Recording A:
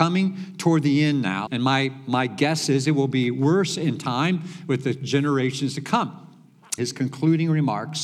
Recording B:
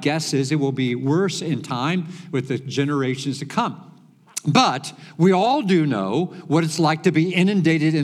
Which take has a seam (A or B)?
A